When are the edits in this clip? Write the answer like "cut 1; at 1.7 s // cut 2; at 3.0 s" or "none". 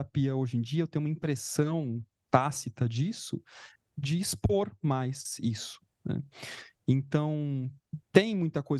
cut 1; at 3.8 s